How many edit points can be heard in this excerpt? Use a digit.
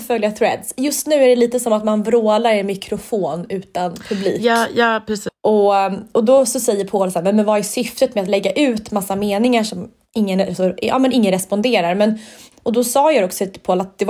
1